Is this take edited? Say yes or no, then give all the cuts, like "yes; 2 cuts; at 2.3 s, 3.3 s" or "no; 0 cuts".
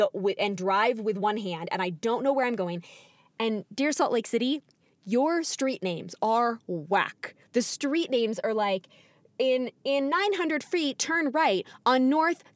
no; 0 cuts